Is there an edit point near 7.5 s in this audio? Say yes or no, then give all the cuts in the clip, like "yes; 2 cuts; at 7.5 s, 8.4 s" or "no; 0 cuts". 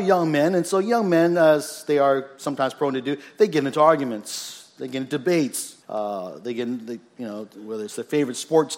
no; 1 cut; at 5.8 s